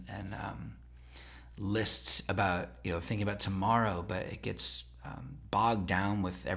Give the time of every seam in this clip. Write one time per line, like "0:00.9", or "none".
none